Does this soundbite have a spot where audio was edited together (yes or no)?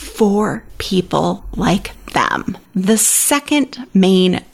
no